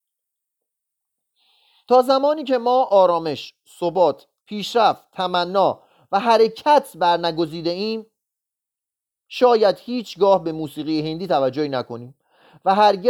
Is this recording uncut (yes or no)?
no